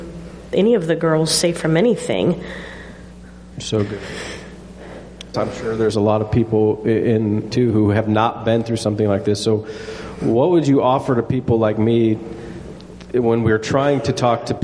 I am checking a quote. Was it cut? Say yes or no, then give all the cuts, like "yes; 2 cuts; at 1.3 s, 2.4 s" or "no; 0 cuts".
yes; 3 cuts; at 3.5 s, 5.3 s, 7.5 s